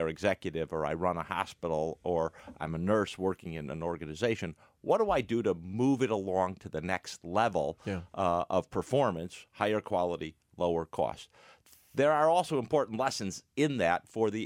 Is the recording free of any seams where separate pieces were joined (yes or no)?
yes